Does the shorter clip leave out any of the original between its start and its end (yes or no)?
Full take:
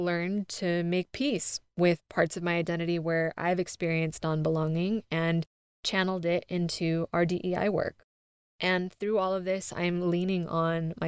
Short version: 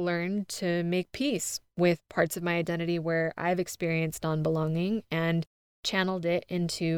no